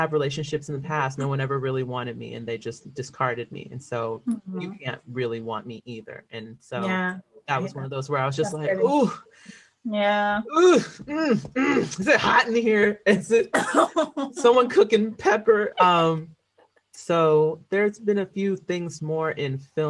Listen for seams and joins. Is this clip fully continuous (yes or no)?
no